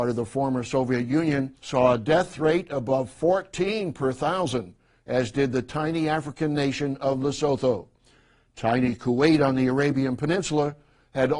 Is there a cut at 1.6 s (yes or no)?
yes